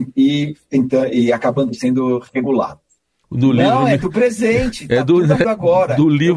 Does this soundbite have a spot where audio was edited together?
yes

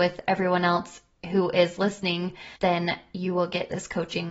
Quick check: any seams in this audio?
yes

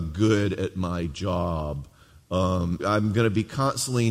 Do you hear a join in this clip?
yes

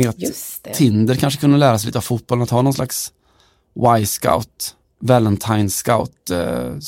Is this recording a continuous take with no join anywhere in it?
yes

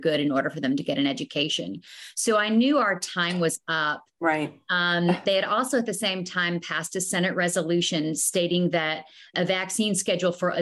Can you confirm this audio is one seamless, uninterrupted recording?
no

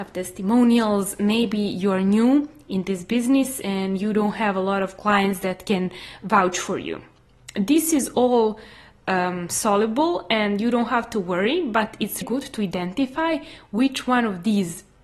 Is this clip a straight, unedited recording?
no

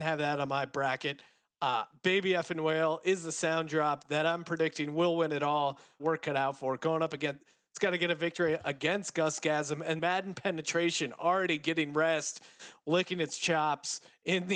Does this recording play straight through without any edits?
no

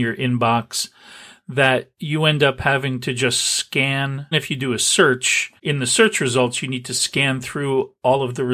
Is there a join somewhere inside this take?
yes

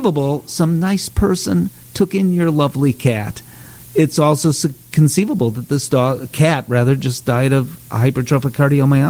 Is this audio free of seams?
yes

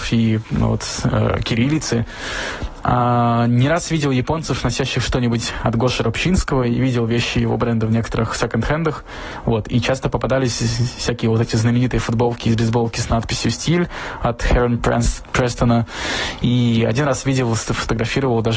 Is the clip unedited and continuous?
yes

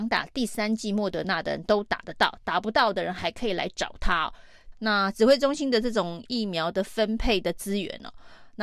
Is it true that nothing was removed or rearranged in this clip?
no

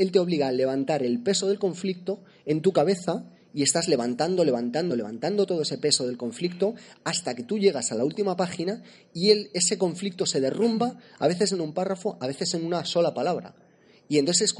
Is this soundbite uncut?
no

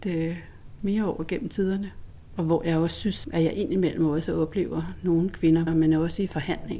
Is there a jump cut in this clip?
yes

